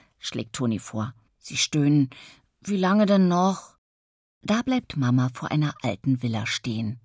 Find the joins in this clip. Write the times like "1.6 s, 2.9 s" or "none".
1.3 s